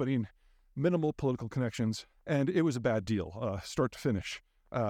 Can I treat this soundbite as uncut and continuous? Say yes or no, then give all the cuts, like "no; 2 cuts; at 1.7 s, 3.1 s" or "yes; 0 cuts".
no; 1 cut; at 2.1 s